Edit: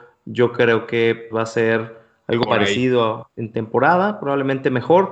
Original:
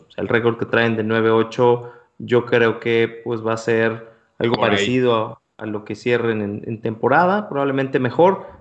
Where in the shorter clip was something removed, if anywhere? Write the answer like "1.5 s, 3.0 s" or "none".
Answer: 1.3 s, 3.4 s